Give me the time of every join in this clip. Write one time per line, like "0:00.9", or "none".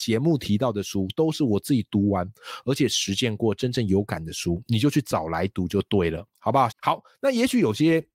0:06.7